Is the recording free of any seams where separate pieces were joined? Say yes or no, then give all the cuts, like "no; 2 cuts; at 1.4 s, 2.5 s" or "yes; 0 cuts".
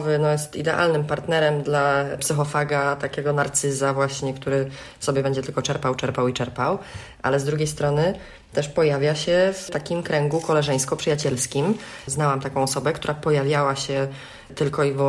yes; 0 cuts